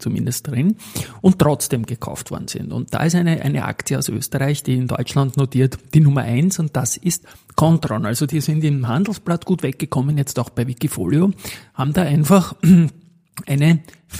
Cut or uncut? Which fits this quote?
uncut